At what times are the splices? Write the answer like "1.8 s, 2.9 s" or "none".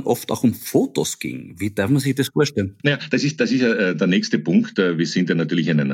none